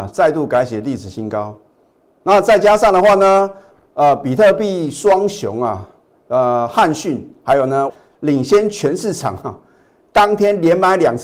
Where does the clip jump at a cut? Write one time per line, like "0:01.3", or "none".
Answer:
0:07.9